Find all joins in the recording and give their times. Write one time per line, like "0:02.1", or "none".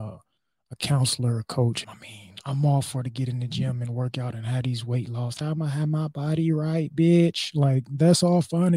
0:01.8
0:05.4